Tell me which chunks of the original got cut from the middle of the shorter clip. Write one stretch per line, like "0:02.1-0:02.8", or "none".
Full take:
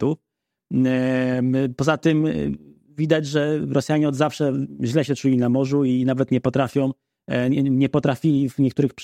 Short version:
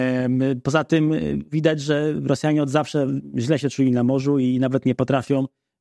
0:02.6-0:02.9

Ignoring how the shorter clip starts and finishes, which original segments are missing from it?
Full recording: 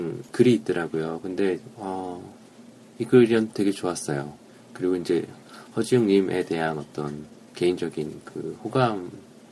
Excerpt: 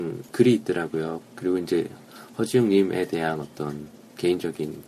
0:01.2-0:04.6

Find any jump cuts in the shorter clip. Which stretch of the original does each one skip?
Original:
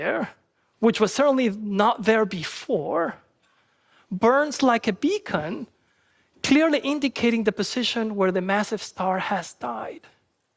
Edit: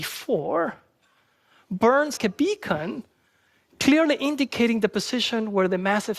0:04.6-0:04.8

